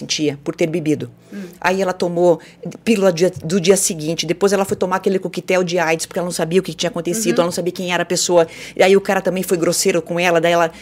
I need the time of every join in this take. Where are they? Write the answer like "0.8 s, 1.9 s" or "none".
1.6 s